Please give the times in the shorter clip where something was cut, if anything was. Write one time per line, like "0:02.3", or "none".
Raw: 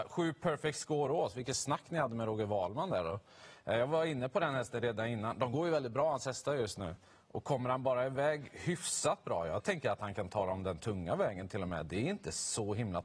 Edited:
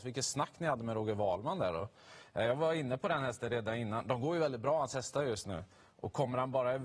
none

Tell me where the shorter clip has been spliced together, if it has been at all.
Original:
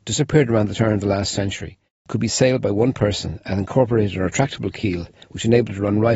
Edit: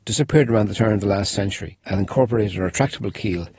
0:01.8

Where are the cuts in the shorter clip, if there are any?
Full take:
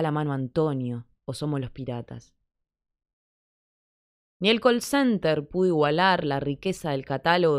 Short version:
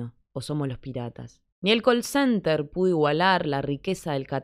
0:01.5

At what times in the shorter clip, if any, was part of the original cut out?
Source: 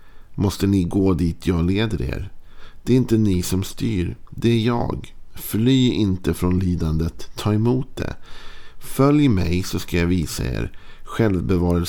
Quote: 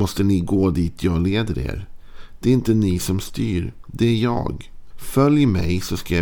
0:04.9

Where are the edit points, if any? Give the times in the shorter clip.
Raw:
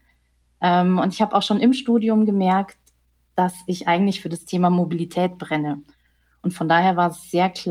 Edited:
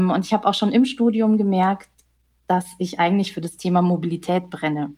none

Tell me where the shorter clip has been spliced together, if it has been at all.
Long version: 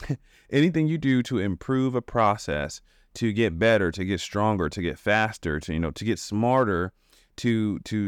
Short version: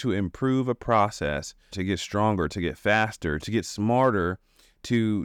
0:01.7
0:03.4

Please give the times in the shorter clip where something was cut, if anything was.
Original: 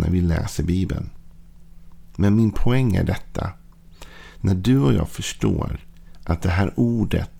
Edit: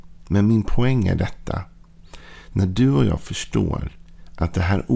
none

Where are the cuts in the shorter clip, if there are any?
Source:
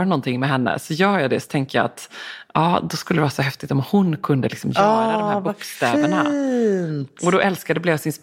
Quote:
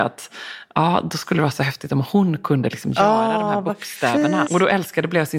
0:04.4

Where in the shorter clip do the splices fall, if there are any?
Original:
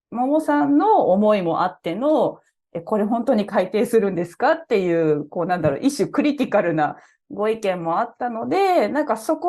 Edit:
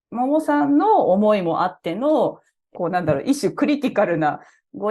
0:02.7

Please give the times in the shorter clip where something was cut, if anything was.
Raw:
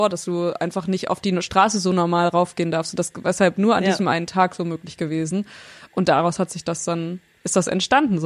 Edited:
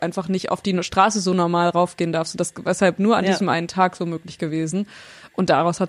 none

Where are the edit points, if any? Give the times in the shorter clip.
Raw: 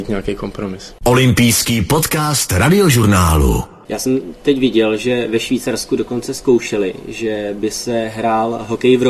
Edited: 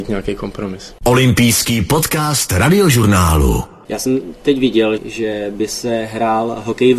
0:05.0

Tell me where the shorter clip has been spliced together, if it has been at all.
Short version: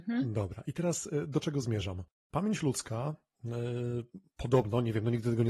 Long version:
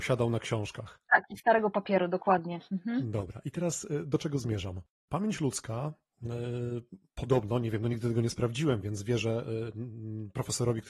none

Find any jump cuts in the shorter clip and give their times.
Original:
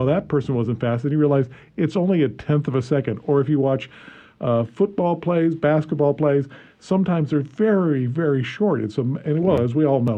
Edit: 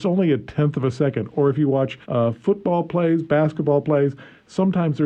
0:02.0

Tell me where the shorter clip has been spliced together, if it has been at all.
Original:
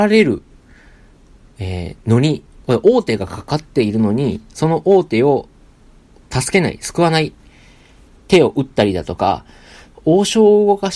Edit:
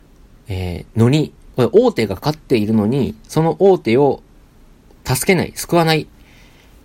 0:02.2

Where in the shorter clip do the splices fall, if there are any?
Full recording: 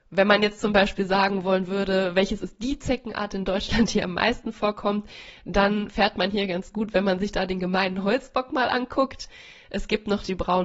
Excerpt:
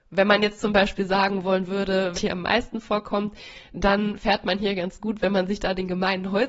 0:02.1

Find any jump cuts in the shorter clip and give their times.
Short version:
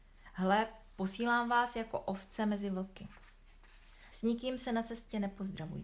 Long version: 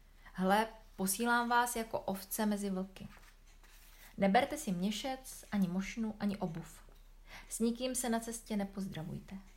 0:04.1

